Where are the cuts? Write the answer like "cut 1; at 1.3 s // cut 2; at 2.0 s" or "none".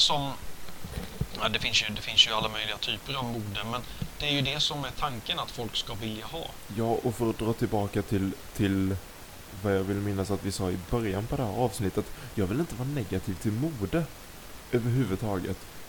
none